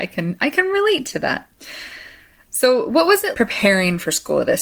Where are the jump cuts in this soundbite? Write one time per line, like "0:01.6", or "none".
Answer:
0:03.3